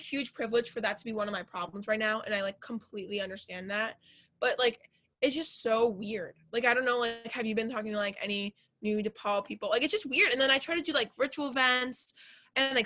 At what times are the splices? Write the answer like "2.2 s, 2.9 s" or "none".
none